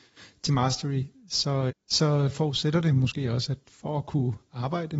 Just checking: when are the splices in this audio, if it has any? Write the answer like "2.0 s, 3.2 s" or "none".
1.7 s

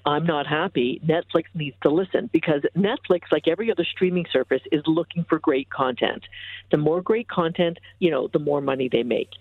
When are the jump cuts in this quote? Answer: 8.0 s

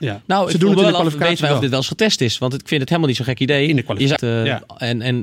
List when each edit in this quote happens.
4.2 s

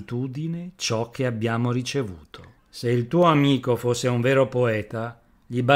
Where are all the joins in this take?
2.6 s

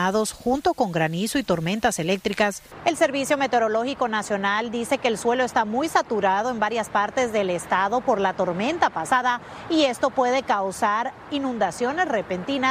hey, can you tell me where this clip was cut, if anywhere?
none

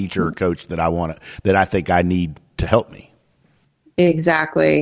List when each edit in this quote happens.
none

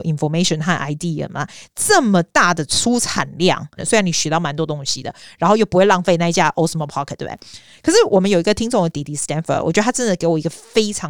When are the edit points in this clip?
3.8 s

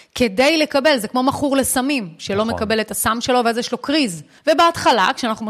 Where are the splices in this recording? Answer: 4.4 s

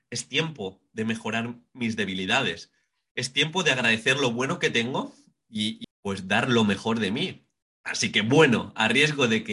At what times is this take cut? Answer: 5.8 s, 7.6 s

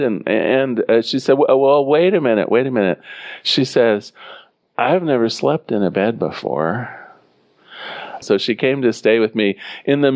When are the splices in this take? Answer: 8.2 s

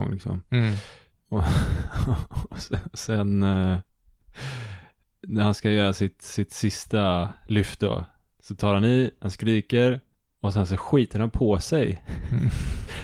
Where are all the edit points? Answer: none

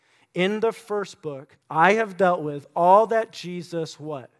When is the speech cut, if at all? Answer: 1.6 s

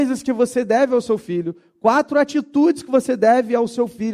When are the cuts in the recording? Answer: none

